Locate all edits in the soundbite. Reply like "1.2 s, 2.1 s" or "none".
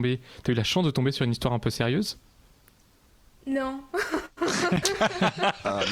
4.8 s